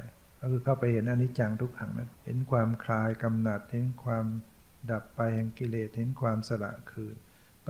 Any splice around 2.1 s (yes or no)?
yes